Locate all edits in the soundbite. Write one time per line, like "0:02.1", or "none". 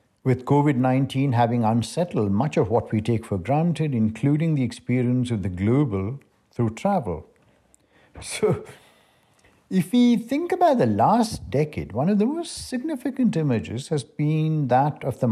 0:08.1